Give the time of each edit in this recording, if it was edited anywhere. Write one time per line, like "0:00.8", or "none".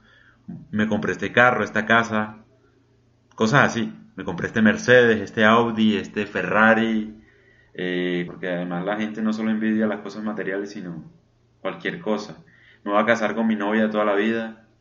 0:08.3